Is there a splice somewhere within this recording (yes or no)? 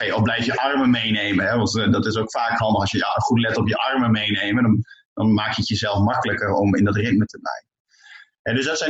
no